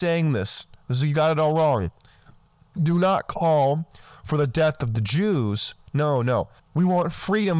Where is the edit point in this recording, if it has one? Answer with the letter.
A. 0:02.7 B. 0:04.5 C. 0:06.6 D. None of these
C